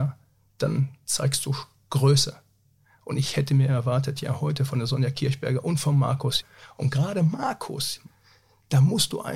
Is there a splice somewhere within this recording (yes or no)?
no